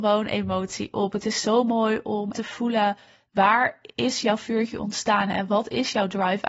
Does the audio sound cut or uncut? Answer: cut